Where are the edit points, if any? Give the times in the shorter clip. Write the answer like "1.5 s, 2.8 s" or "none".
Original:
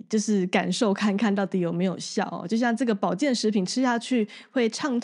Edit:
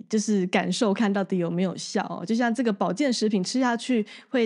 0.9 s

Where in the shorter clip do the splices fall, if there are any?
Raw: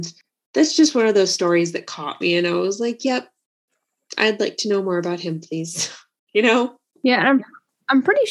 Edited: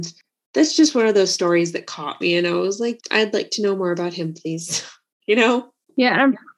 3.0 s

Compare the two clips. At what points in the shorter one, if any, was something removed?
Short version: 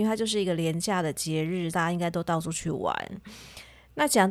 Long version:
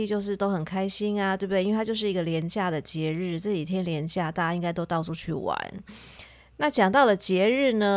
1.7 s

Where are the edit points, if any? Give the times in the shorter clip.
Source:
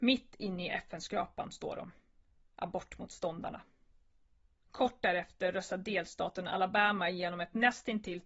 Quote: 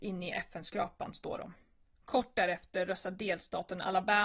1.9 s

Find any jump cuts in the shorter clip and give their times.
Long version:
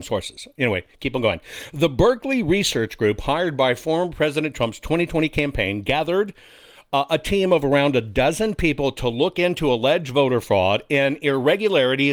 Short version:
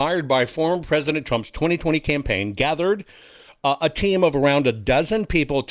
none

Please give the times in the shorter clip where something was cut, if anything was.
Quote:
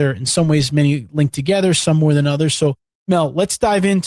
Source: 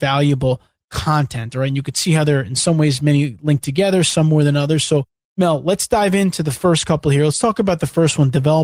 none

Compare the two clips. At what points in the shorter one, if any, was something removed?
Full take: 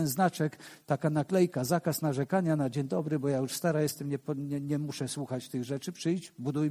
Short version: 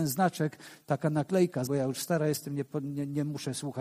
1.7 s

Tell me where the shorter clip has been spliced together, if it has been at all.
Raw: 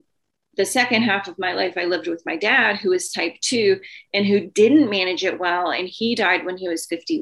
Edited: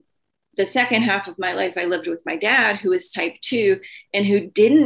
none

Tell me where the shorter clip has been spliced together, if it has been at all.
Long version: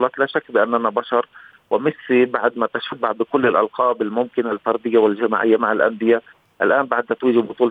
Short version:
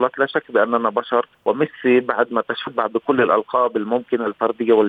1.3 s

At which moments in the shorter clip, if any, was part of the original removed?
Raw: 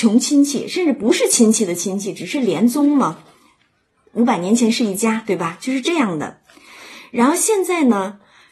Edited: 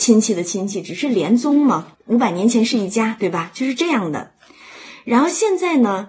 1.9 s

